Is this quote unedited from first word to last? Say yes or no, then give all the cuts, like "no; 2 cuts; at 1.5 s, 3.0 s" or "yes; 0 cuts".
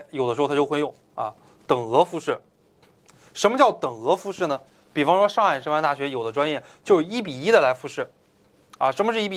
yes; 0 cuts